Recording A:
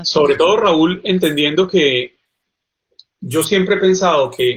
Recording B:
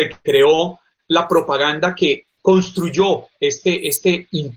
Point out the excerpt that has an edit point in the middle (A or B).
B